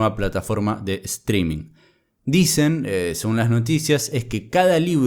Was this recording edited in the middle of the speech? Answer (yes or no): no